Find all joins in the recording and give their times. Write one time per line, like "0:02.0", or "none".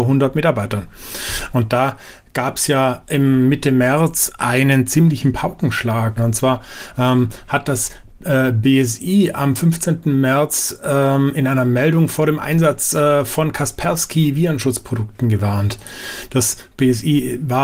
0:01.5
0:06.2